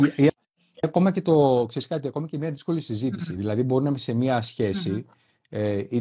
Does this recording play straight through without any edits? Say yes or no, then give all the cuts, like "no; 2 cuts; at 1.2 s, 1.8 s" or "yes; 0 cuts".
yes; 0 cuts